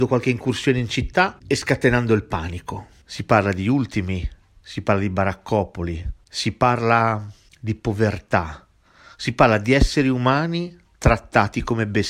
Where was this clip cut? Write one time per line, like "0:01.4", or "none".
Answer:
0:03.0